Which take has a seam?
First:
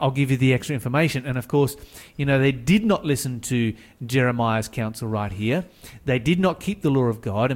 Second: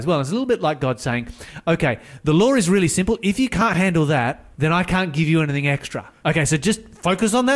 second; 2 cuts; at 4.5 s, 6.2 s

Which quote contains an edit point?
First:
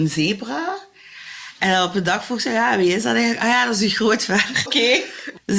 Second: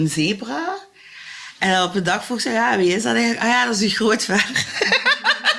first; 1 cut; at 4.7 s

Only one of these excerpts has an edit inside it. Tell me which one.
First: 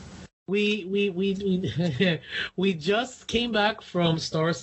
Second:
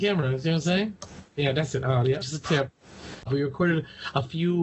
second; 2 cuts; at 2.2 s, 3.3 s

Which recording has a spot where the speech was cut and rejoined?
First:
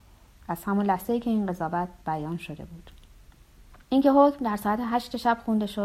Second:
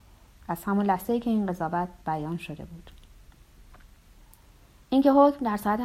first; 1 cut; at 3.8 s

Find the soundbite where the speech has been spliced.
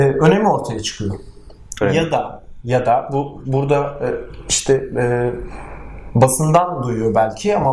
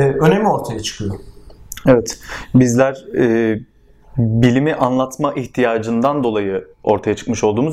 first; 1 cut; at 1.8 s

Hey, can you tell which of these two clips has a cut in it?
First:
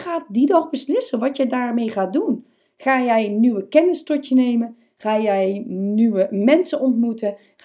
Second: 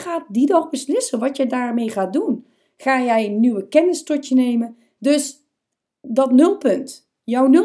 second; 1 cut; at 5.0 s

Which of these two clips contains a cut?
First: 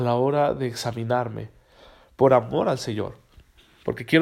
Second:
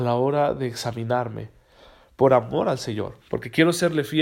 second; 1 cut; at 3.2 s

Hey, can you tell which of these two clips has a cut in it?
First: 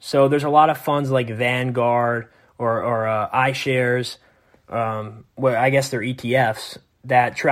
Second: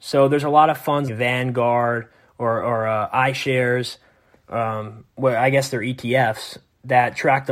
second; 1 cut; at 1.1 s

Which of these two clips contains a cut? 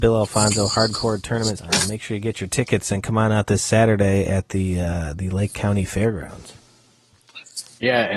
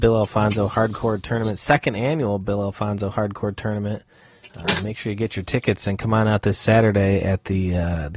first; 1 cut; at 1.6 s

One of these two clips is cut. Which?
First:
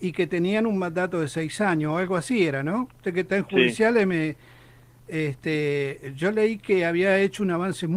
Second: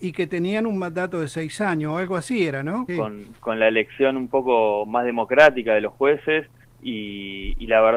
second; 2 cuts; at 2.9 s, 6.6 s

